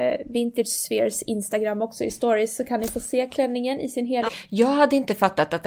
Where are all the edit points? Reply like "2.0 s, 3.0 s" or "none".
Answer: 4.3 s